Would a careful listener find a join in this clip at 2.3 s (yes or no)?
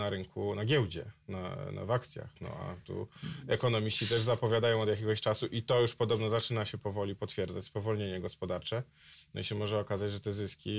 no